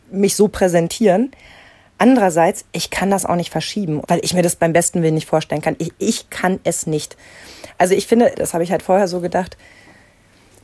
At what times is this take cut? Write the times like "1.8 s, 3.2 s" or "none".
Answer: 4.0 s, 8.3 s